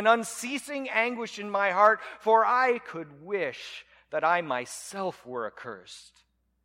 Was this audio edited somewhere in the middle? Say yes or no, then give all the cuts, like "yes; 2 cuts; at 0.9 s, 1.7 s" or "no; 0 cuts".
no; 0 cuts